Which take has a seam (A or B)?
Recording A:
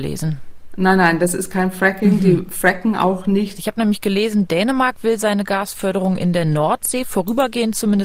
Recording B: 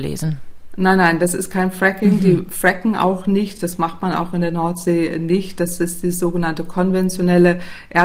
A